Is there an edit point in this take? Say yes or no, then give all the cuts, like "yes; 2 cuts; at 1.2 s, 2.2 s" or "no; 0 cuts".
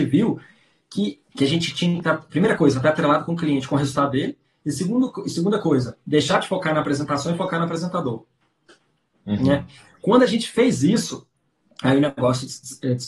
yes; 1 cut; at 1.3 s